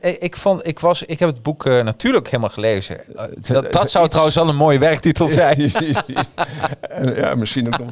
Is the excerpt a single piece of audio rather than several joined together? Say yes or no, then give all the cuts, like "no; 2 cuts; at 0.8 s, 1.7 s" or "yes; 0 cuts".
no; 1 cut; at 3.0 s